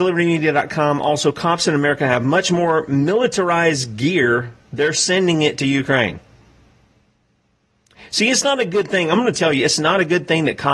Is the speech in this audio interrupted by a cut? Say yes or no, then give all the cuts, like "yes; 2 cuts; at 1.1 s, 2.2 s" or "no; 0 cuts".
no; 0 cuts